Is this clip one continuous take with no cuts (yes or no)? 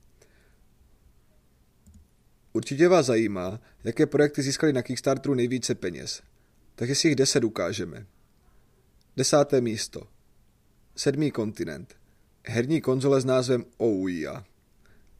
no